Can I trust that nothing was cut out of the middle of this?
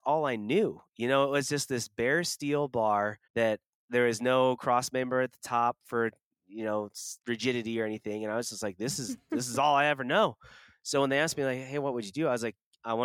no; 2 cuts; at 3.2 s, 7.2 s

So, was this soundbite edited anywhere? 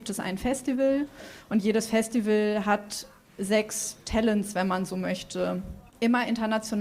yes; 1 cut; at 5.9 s

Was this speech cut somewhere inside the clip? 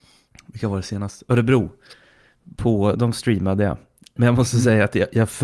yes; 1 cut; at 2.9 s

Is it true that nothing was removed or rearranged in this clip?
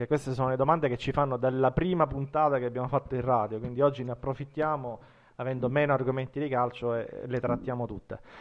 yes; 0 cuts

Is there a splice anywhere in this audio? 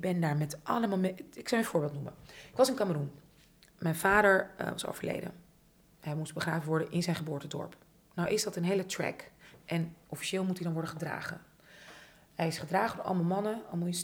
no; 0 cuts

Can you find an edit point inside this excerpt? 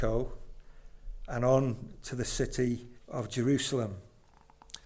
yes; 1 cut; at 3.0 s

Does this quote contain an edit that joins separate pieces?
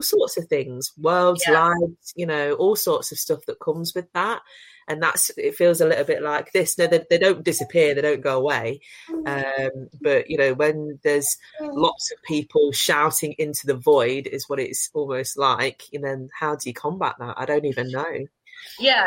no; 0 cuts

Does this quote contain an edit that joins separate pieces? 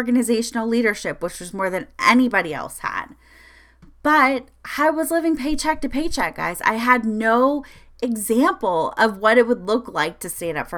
no; 0 cuts

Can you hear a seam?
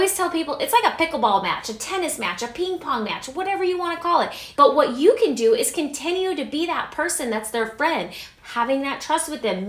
yes; 2 cuts; at 4.6 s, 8.4 s

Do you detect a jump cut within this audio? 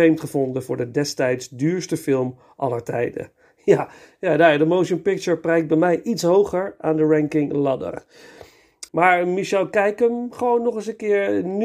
yes; 1 cut; at 8.9 s

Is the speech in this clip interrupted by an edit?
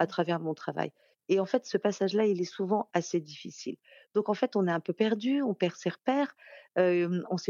no; 0 cuts

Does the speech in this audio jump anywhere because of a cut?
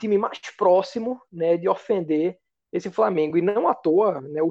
no; 0 cuts

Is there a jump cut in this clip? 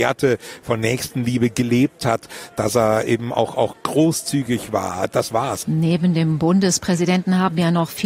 yes; 1 cut; at 5.6 s

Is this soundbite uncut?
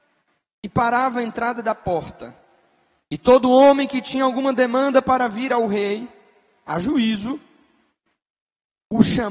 yes; 0 cuts

